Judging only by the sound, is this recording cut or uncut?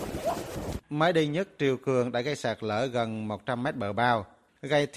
uncut